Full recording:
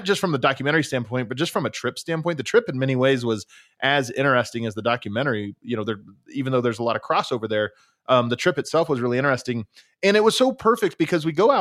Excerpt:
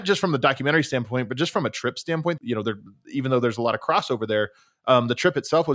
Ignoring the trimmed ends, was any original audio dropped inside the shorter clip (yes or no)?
yes